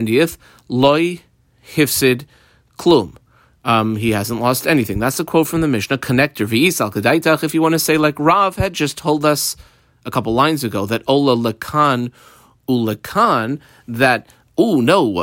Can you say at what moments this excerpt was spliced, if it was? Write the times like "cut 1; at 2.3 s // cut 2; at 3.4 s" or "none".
none